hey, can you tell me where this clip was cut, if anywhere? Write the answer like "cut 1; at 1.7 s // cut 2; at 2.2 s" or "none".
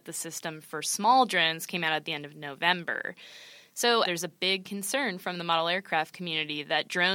cut 1; at 4.0 s